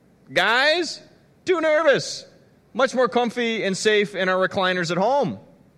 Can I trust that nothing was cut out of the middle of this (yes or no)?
yes